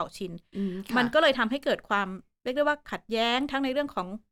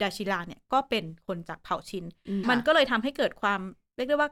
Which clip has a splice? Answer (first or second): second